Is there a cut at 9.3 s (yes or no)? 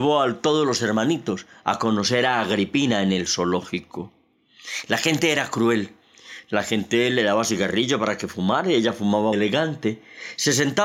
yes